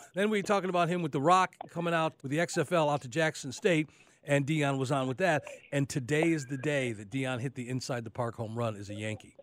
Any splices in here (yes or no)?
yes